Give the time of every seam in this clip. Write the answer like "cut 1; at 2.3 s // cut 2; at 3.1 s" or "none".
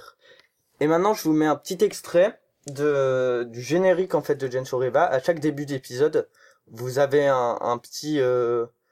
none